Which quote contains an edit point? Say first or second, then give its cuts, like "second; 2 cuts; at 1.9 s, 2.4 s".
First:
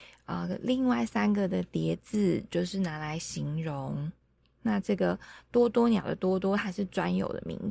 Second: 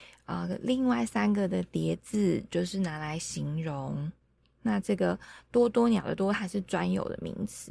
second; 1 cut; at 6.2 s